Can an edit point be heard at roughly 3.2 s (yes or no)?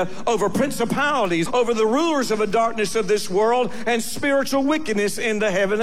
no